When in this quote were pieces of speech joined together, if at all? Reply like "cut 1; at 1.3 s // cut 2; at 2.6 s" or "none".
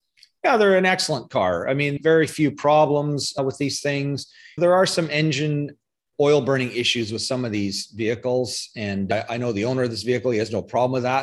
none